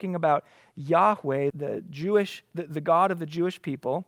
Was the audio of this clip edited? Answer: yes; 1 cut; at 1.5 s

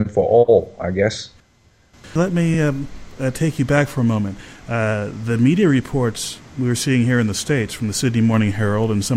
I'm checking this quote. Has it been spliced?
no; 0 cuts

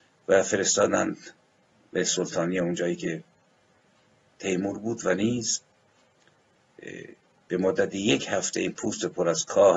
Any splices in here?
no; 0 cuts

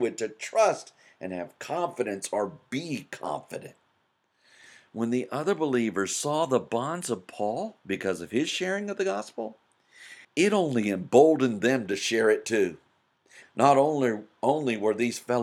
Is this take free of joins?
no; 2 cuts; at 10.2 s, 13.4 s

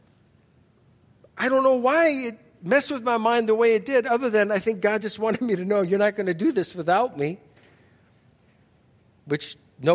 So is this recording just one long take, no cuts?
yes; 0 cuts

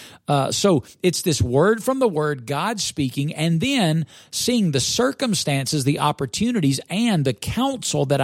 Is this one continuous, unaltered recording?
yes; 0 cuts

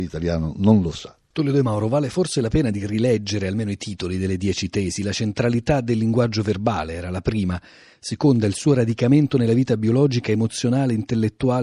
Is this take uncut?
yes; 0 cuts

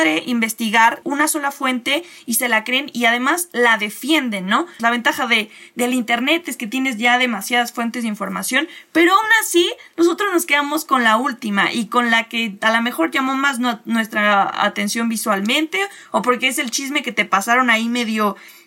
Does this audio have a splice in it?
yes; 2 cuts; at 1.0 s, 4.8 s

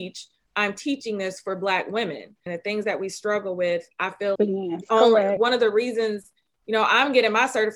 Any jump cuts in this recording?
yes; 3 cuts; at 2.5 s, 4.4 s, 5.4 s

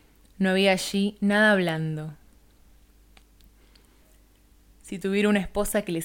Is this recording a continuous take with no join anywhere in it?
yes; 0 cuts

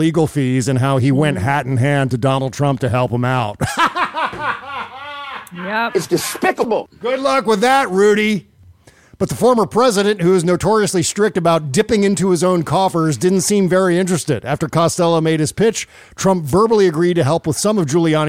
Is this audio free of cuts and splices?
yes; 0 cuts

